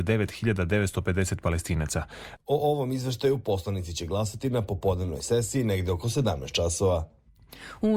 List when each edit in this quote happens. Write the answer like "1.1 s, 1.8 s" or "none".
2.4 s